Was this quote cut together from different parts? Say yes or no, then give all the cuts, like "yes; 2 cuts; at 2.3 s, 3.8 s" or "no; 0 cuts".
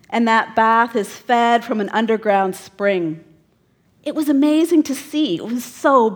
yes; 1 cut; at 3.8 s